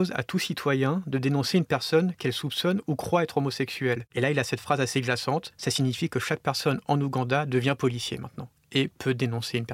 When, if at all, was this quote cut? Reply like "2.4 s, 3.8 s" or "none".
none